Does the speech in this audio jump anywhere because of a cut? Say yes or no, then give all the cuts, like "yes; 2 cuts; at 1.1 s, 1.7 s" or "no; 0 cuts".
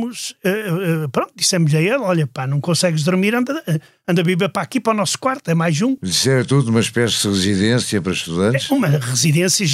no; 0 cuts